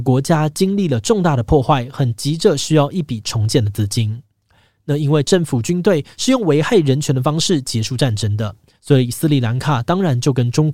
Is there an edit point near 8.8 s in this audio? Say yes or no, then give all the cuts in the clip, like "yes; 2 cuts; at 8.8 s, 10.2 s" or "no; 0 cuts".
yes; 1 cut; at 8.8 s